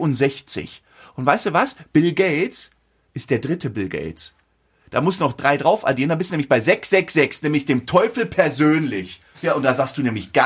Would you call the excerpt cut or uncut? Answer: cut